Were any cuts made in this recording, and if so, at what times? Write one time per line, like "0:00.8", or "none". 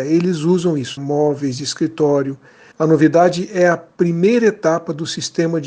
0:01.0
0:02.7